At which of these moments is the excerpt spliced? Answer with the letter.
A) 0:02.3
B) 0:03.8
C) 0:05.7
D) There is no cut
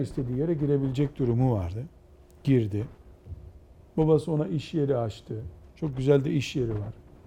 B